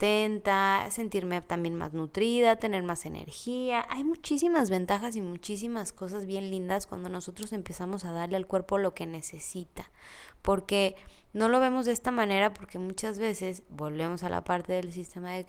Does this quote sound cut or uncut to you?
uncut